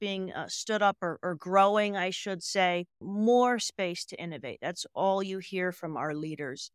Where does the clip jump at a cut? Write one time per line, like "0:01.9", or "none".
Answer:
0:03.0